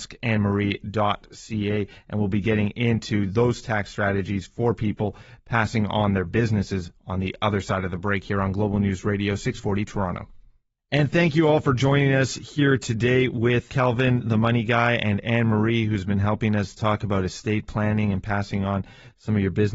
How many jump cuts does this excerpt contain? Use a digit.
1